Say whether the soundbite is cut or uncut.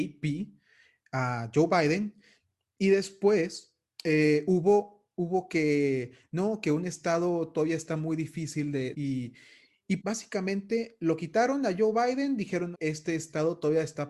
cut